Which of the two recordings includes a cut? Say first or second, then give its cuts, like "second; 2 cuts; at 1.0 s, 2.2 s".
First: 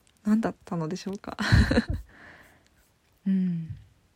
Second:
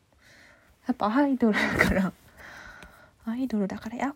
first; 1 cut; at 3.2 s